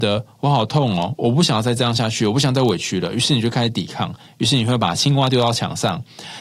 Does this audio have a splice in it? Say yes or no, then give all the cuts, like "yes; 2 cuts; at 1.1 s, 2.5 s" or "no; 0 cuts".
no; 0 cuts